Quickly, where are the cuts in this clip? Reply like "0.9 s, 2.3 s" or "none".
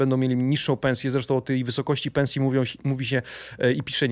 none

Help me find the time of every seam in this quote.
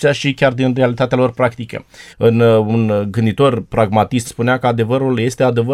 2.1 s, 4.2 s

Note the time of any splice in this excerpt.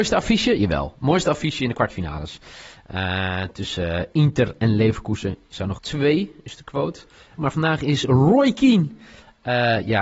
5.8 s, 7.4 s

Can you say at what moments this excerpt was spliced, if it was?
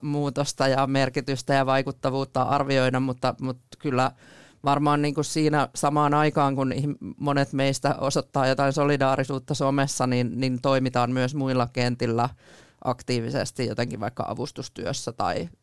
none

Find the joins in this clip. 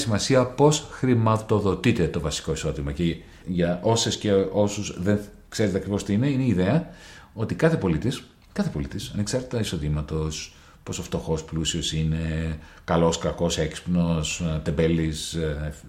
3.4 s

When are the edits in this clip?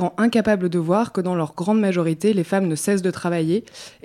none

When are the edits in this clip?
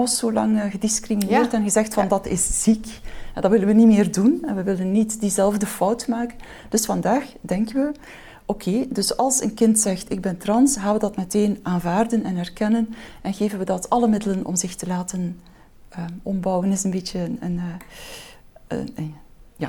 none

